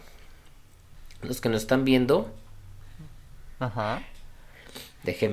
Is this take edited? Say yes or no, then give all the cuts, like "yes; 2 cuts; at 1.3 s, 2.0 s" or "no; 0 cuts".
no; 0 cuts